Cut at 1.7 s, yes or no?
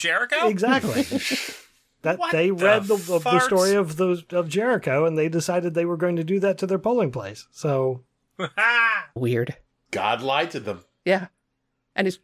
no